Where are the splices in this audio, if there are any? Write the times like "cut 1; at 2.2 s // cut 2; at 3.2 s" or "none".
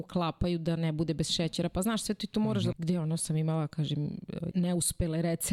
cut 1; at 2.7 s // cut 2; at 4.5 s